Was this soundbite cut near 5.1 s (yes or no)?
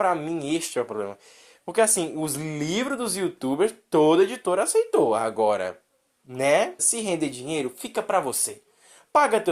no